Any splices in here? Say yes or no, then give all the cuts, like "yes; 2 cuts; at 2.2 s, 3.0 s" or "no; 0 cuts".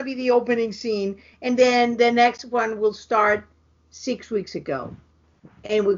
no; 0 cuts